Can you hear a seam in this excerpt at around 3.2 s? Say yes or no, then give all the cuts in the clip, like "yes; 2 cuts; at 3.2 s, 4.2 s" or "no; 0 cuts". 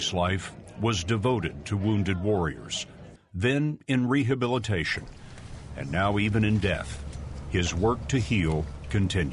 yes; 1 cut; at 3.2 s